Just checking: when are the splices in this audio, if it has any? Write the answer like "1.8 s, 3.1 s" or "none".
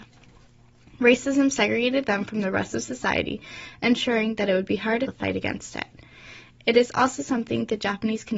5.1 s